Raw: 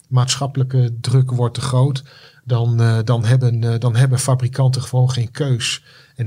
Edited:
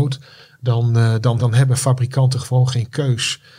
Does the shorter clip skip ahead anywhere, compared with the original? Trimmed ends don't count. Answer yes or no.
yes